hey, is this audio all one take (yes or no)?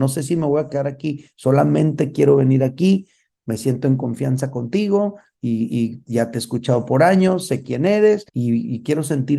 no